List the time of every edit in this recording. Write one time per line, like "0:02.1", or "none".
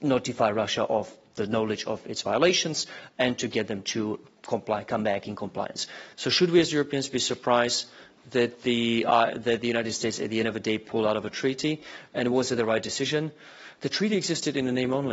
0:06.1